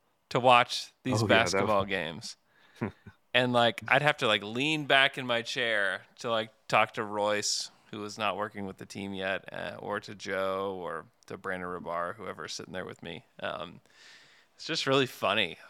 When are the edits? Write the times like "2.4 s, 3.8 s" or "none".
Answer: none